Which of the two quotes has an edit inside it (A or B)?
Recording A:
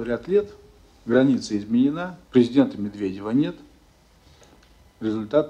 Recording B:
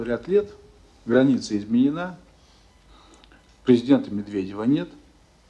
A